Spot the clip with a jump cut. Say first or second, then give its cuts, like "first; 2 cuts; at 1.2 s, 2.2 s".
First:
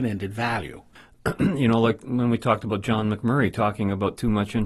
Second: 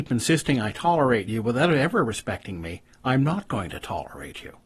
first; 1 cut; at 1.0 s